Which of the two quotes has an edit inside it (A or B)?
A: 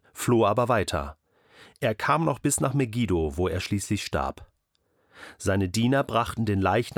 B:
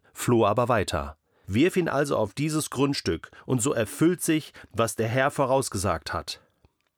B